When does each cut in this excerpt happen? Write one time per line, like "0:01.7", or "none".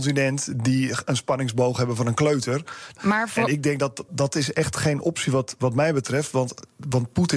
0:03.0
0:04.1

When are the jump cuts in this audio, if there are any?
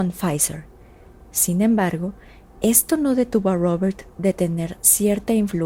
none

